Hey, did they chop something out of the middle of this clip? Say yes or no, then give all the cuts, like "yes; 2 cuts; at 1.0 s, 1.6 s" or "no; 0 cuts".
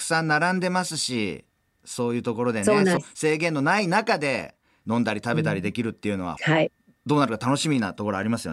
yes; 2 cuts; at 3.0 s, 6.4 s